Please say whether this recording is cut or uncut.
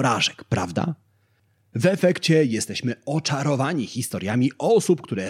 uncut